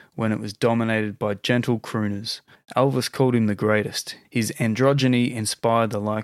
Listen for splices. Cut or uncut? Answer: cut